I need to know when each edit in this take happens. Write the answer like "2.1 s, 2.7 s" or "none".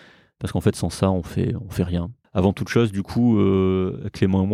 2.2 s